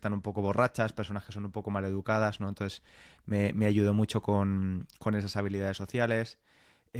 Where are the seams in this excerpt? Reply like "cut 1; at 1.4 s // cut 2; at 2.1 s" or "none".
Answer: none